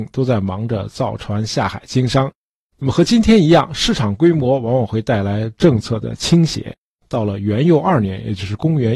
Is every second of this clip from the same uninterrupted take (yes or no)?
yes